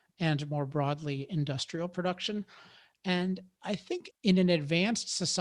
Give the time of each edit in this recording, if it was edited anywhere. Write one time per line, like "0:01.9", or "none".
0:04.1